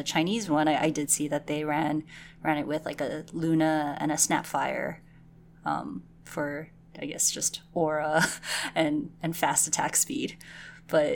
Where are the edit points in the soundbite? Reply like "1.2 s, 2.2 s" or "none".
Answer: none